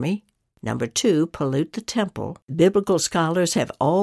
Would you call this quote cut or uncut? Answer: cut